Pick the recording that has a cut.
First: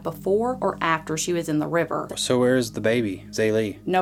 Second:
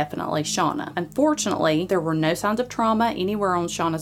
first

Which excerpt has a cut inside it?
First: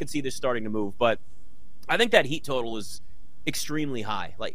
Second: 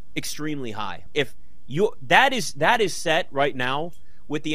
second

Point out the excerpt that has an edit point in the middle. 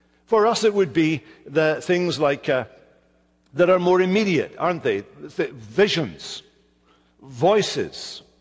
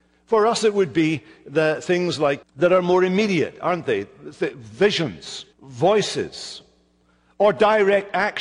second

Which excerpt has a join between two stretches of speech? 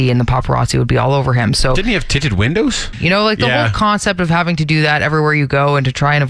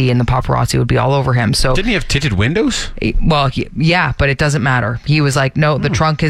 first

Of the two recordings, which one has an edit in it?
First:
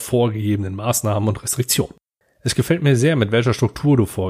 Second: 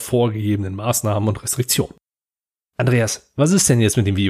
first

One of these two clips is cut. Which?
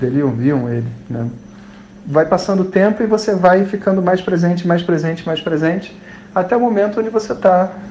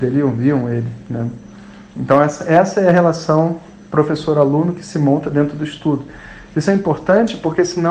first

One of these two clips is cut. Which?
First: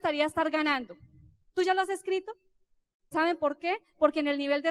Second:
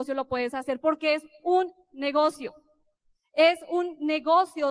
first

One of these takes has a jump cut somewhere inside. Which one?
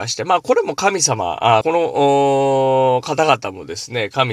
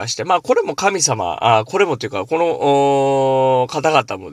first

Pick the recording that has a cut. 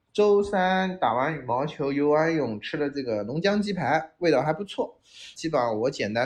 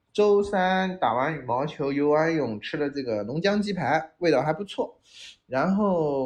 first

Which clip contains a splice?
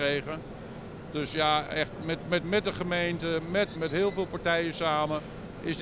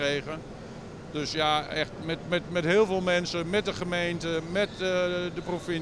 first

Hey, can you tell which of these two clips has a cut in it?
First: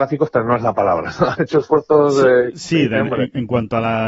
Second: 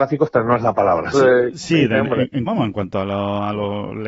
second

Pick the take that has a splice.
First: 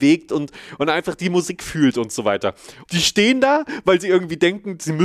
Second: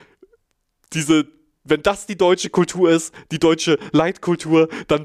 first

